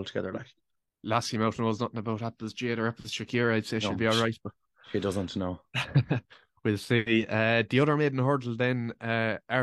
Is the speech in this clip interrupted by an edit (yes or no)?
no